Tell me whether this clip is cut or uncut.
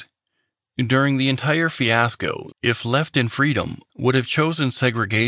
cut